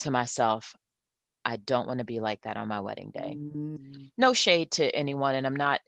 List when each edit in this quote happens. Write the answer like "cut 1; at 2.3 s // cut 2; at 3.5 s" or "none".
cut 1; at 3.8 s

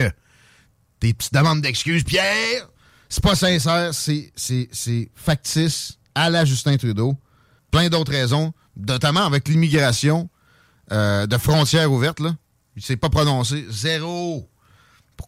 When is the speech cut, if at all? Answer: cut 1; at 7.6 s

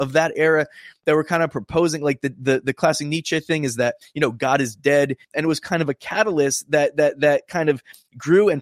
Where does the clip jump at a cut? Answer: cut 1; at 5.2 s

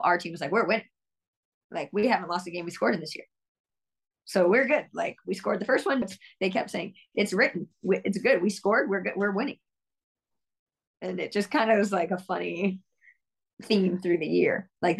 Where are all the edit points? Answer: cut 1; at 6.0 s

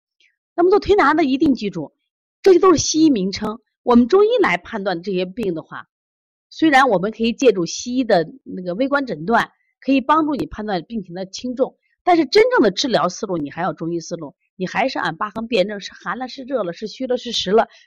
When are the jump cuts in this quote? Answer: none

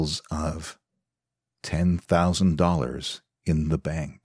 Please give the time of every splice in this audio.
none

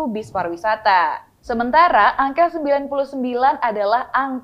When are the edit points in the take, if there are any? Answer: cut 1; at 1.4 s

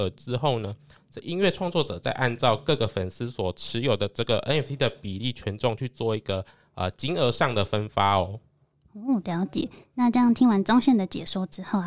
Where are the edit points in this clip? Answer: none

